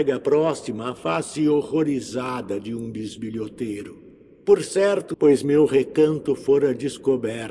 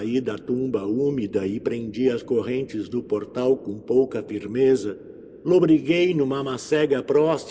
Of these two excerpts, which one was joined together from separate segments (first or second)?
first